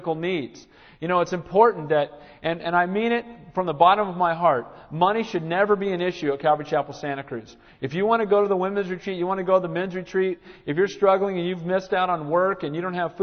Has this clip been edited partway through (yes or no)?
no